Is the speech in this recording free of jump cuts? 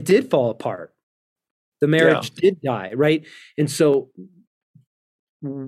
yes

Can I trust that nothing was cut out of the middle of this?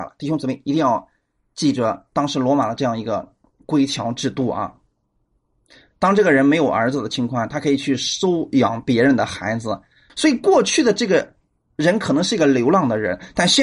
no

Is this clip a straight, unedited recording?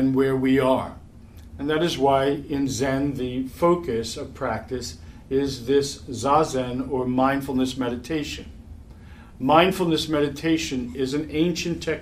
yes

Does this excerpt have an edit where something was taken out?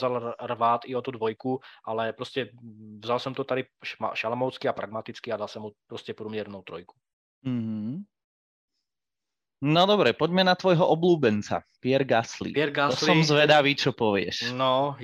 no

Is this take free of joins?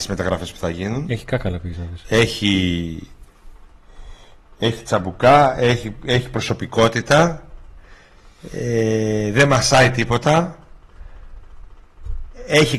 yes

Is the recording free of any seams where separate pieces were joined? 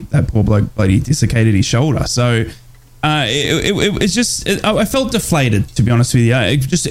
yes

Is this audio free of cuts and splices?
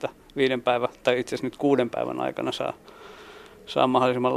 yes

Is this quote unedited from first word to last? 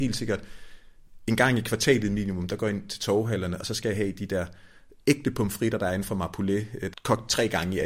no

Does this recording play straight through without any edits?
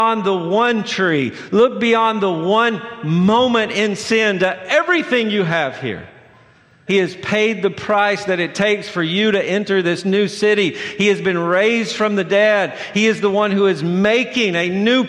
no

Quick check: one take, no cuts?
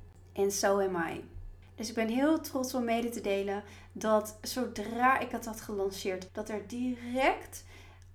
no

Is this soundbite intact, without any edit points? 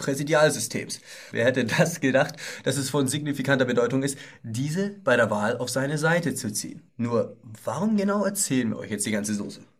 no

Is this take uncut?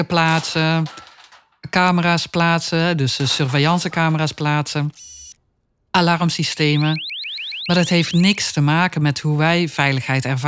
yes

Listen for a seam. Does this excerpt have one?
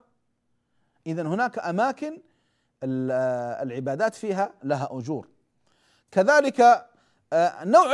yes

